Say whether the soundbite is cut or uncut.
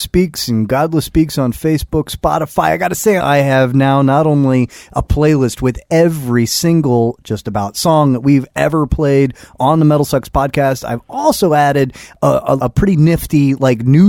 cut